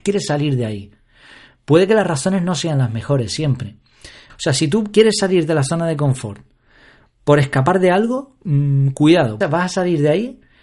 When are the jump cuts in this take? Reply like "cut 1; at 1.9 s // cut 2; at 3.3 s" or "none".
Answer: cut 1; at 4.3 s // cut 2; at 9.4 s